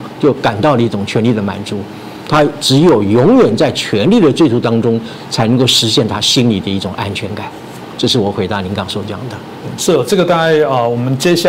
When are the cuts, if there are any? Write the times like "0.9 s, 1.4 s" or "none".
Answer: 7.9 s